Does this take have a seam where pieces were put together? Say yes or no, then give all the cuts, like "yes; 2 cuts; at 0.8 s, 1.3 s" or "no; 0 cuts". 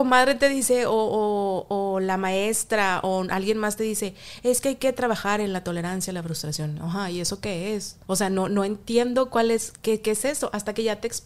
yes; 1 cut; at 8.0 s